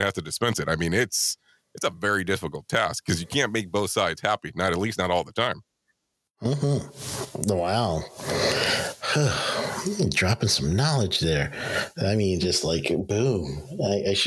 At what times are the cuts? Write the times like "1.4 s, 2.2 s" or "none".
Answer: none